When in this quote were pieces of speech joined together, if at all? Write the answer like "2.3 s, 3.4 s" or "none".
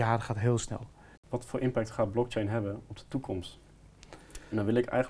1.2 s